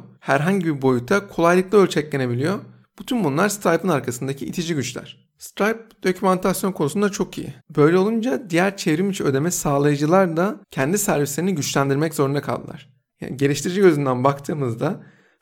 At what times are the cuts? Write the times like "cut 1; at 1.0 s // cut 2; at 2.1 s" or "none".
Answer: cut 1; at 7.6 s // cut 2; at 10.6 s // cut 3; at 13.1 s